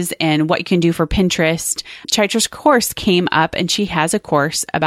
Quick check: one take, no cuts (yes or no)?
no